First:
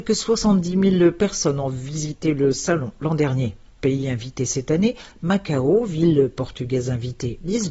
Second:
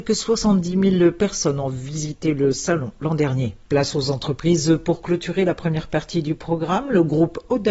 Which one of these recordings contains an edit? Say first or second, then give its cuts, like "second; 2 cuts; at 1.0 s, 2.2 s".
second; 1 cut; at 3.7 s